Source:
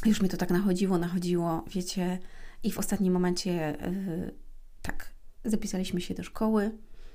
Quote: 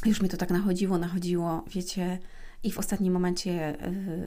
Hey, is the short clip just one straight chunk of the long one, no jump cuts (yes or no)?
yes